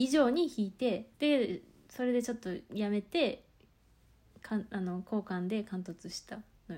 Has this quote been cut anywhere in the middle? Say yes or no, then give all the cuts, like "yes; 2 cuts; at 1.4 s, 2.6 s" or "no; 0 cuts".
yes; 1 cut; at 1.1 s